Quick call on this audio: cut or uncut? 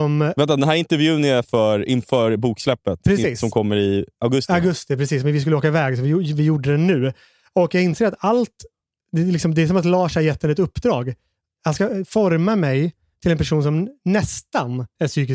uncut